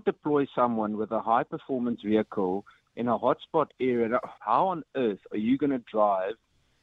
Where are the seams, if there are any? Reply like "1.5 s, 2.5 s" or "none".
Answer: 4.4 s